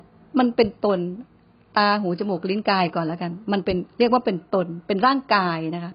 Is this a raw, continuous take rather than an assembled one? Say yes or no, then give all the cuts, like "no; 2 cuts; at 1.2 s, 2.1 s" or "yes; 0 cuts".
yes; 0 cuts